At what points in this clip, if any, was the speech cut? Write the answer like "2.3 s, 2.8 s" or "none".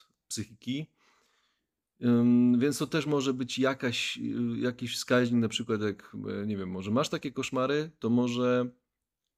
none